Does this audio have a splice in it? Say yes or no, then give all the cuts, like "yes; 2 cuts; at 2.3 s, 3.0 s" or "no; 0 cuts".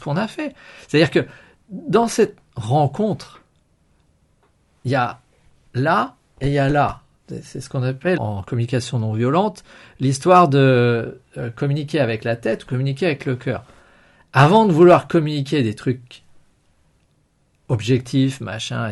yes; 1 cut; at 8.2 s